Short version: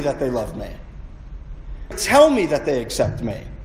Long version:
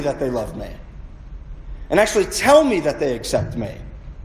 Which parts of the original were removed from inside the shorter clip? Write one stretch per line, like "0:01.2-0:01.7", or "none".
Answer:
0:01.9-0:02.3